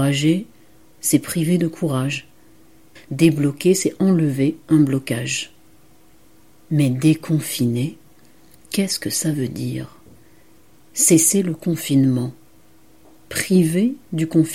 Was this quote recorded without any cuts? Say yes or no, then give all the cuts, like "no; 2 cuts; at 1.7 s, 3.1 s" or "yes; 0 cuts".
no; 1 cut; at 3.0 s